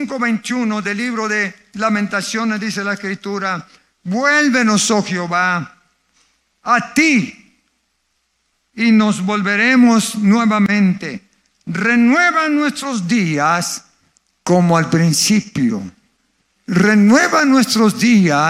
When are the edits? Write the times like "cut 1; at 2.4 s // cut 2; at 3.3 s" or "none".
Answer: none